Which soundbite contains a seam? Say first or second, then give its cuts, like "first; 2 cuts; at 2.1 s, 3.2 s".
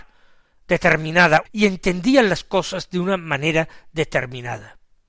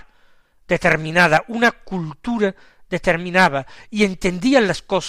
first; 1 cut; at 1.5 s